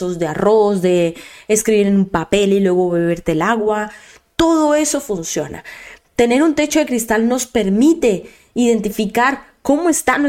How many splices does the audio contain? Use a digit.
1